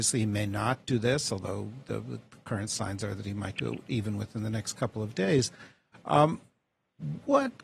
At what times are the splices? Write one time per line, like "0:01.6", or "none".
none